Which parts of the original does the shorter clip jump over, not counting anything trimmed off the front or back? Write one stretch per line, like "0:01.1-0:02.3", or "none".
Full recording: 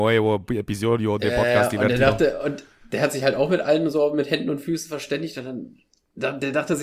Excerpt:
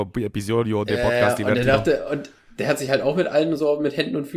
none